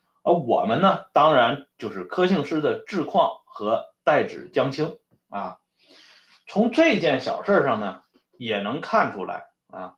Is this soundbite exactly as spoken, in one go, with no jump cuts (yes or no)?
yes